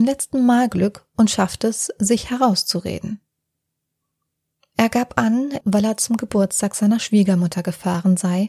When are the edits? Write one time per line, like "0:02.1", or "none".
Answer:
0:05.6